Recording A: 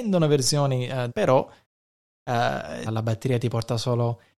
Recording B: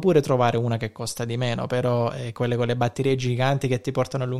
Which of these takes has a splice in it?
A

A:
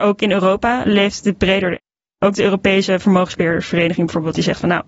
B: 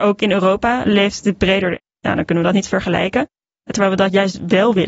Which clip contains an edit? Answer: B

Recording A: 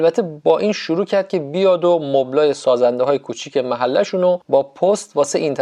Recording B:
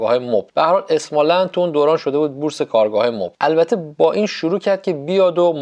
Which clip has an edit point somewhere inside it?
B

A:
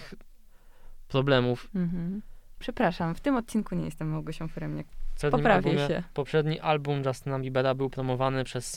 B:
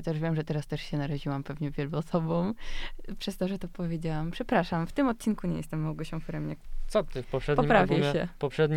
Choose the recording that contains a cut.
A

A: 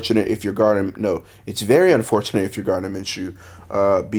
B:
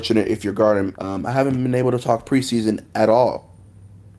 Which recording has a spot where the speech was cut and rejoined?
B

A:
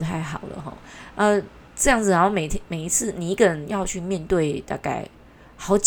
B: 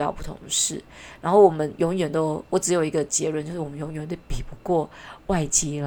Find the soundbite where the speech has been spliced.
A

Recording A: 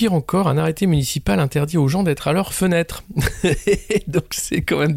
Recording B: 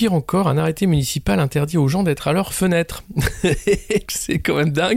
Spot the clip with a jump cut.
B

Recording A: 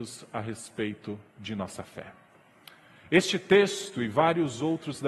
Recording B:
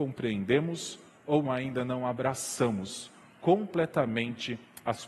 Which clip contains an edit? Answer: B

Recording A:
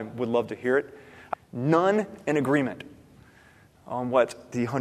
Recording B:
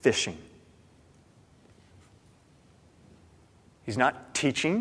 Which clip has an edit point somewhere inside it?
A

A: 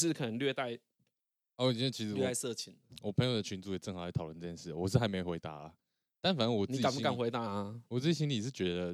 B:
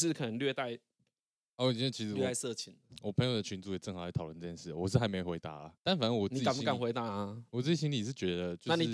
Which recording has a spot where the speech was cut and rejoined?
B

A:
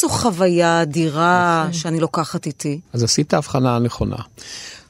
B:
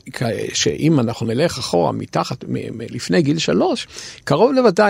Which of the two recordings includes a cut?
A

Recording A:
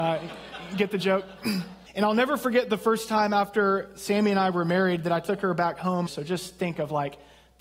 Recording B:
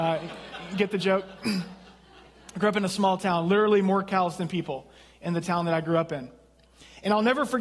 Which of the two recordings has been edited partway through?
A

